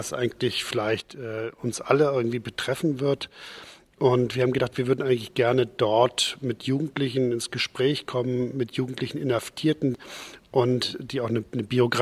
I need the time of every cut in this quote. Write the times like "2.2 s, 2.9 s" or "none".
none